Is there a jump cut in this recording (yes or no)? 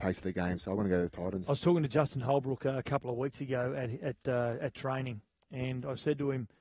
no